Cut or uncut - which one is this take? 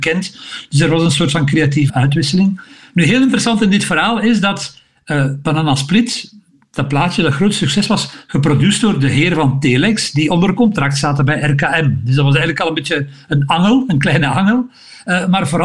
cut